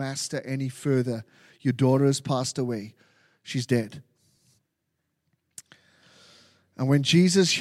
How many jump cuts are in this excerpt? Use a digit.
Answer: 0